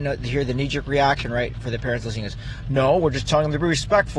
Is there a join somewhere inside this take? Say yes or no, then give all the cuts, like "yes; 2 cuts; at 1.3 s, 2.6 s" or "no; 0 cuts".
no; 0 cuts